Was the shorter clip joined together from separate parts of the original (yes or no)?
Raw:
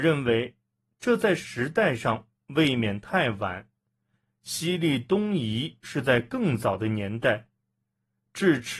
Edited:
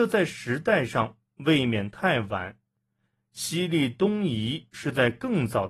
no